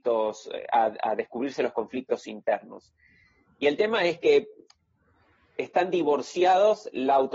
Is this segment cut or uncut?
uncut